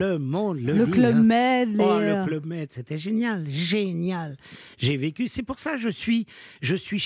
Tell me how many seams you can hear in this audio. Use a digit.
0